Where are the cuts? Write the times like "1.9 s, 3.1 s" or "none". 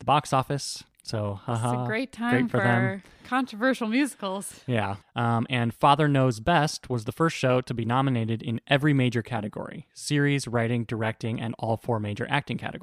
5.0 s